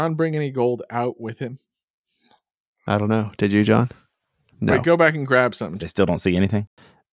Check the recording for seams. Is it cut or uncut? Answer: cut